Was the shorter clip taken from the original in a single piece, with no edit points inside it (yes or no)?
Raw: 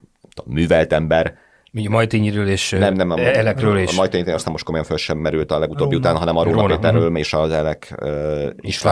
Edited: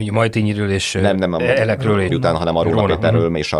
no